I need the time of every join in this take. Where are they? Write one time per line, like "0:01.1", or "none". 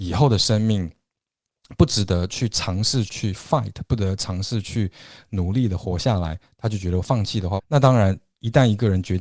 0:03.1
0:07.6